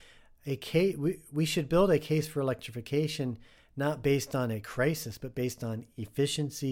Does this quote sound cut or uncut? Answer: uncut